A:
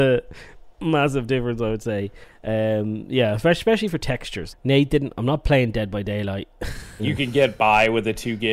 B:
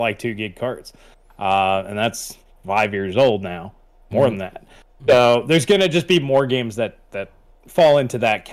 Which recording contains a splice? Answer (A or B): A